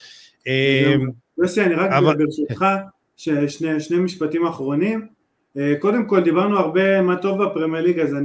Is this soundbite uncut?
yes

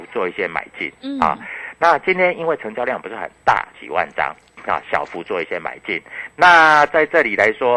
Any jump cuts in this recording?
yes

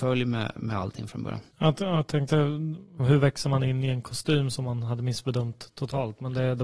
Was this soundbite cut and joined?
yes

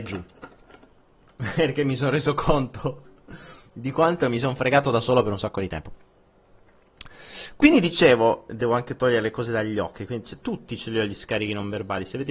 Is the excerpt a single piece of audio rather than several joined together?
yes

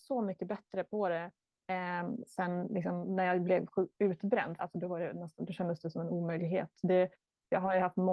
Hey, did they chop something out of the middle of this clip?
yes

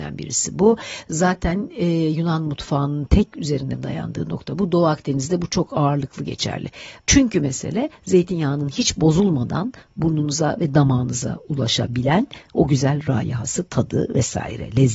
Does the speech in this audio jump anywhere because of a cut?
yes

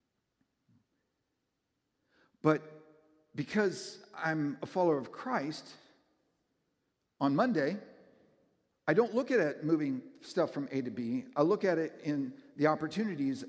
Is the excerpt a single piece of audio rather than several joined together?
yes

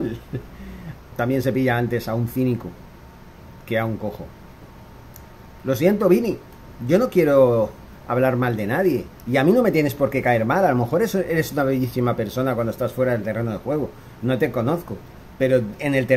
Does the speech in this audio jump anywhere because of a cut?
yes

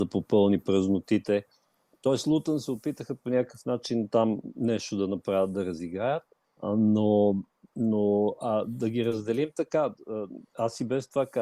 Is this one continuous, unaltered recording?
no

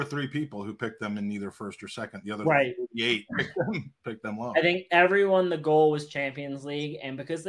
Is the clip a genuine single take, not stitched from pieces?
yes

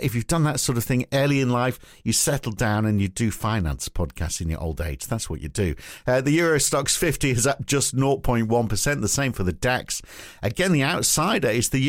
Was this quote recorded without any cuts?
yes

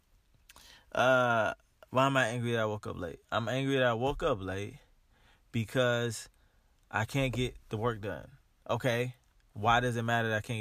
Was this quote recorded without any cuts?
yes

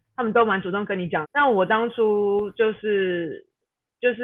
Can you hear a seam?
yes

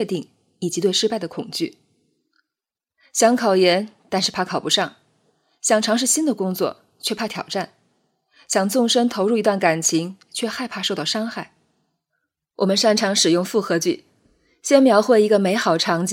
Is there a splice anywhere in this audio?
no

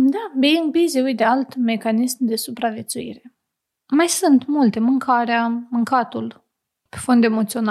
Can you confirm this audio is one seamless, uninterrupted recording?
yes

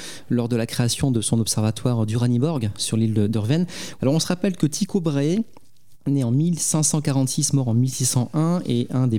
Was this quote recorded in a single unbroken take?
no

